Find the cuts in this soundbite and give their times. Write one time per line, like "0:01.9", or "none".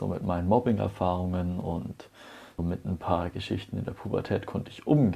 0:02.6